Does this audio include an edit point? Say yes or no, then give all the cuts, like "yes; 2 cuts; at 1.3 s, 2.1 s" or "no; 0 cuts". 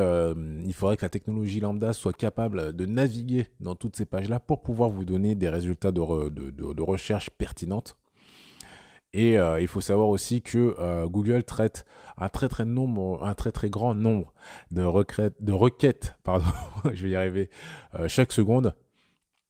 no; 0 cuts